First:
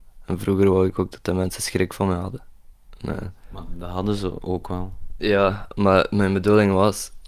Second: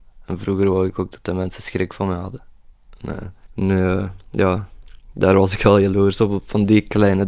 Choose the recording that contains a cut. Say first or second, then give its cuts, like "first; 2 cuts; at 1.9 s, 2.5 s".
second; 1 cut; at 3.5 s